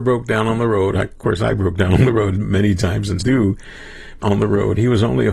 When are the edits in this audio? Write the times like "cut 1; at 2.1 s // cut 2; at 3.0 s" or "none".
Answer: cut 1; at 0.9 s // cut 2; at 3.2 s // cut 3; at 4.2 s